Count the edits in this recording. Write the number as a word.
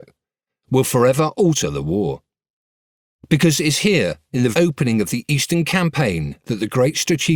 one